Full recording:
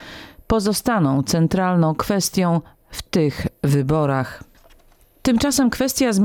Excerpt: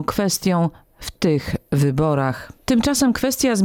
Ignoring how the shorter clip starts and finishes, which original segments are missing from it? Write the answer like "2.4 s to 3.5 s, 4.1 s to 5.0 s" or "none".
4.5 s to 5.1 s